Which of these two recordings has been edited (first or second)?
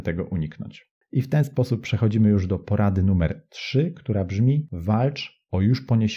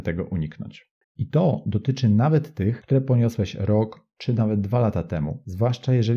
second